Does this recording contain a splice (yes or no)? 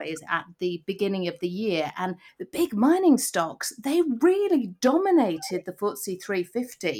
yes